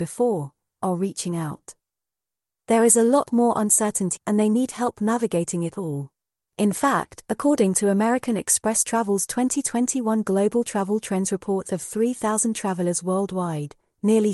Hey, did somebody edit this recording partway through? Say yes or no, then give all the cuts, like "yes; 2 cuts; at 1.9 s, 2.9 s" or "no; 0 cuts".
yes; 2 cuts; at 4.2 s, 6.4 s